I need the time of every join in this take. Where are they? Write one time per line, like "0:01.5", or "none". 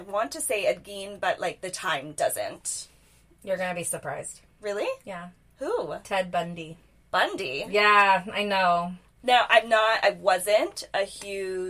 none